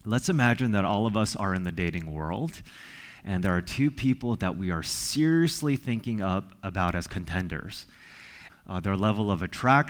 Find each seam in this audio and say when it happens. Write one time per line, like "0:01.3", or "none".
0:08.5